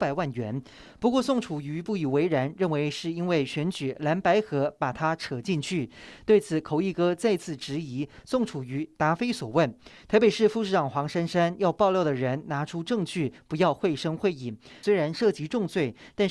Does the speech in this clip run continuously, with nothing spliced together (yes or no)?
no